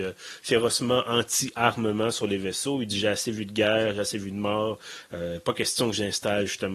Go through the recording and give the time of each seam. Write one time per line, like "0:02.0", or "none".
none

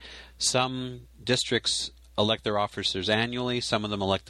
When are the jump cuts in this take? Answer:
none

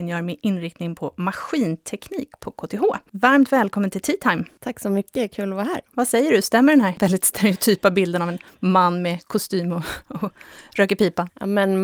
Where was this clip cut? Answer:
none

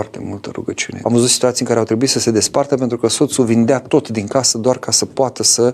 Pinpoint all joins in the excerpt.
0:01.0

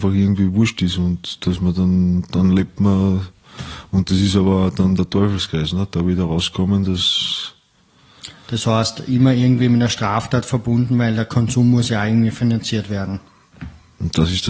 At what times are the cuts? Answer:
none

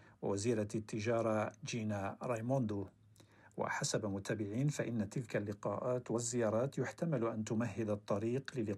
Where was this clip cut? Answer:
none

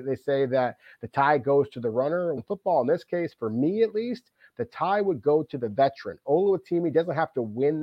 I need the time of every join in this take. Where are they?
0:02.4

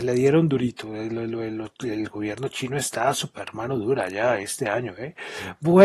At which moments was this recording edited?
none

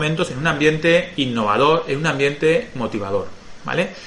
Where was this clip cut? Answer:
none

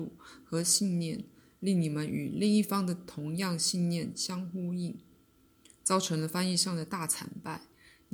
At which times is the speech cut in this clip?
none

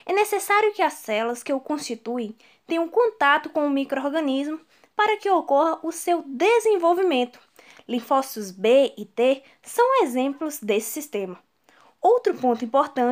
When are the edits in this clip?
none

